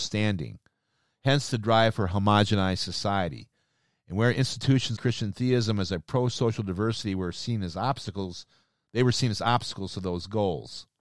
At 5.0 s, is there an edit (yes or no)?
yes